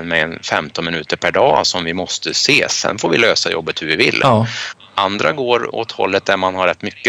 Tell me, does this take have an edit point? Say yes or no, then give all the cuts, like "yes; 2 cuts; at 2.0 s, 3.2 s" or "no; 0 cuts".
no; 0 cuts